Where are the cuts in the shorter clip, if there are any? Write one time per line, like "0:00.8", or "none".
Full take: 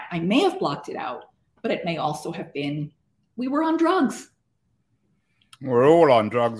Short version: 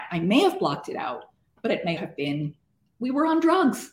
0:02.0